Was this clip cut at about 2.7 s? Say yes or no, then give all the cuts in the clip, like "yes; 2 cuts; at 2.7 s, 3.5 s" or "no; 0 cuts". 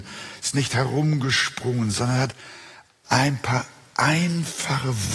no; 0 cuts